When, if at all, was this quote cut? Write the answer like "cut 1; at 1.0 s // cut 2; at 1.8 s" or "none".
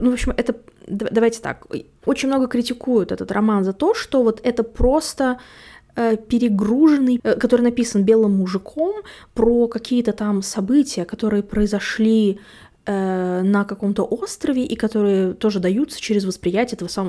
cut 1; at 2.0 s // cut 2; at 7.2 s